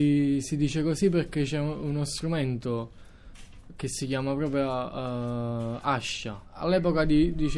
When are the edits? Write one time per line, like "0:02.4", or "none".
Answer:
none